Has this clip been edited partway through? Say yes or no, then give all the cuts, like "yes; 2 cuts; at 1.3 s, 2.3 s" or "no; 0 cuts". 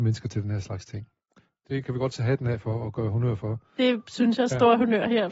no; 0 cuts